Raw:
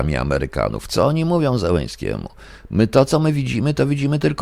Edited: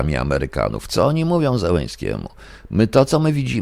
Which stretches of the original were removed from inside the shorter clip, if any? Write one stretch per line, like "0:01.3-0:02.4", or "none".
none